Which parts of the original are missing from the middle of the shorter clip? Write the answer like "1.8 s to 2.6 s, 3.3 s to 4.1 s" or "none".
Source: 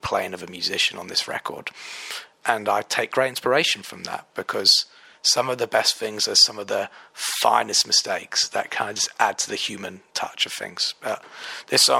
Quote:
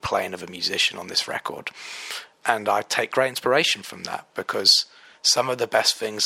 none